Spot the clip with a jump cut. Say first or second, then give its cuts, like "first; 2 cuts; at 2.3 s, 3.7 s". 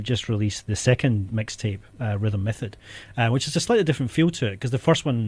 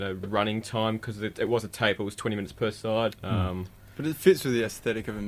second; 2 cuts; at 1.3 s, 3.2 s